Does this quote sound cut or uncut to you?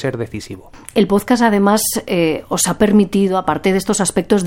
uncut